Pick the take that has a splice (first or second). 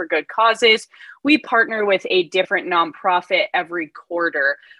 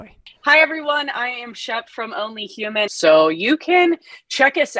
second